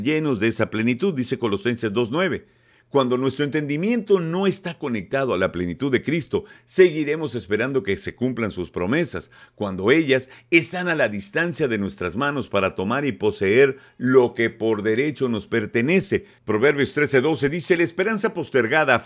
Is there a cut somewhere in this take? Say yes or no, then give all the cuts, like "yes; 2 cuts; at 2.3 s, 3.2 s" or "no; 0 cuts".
no; 0 cuts